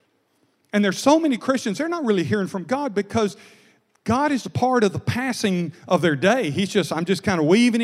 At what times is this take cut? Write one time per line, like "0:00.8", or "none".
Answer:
0:04.4